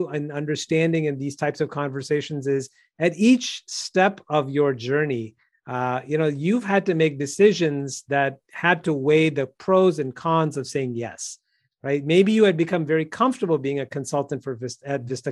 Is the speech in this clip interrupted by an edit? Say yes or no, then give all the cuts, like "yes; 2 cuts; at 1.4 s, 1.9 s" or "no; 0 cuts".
no; 0 cuts